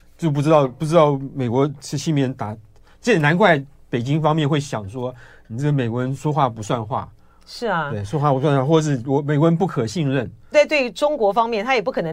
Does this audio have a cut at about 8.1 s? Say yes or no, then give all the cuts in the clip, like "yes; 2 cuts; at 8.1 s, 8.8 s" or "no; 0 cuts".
no; 1 cut; at 10.5 s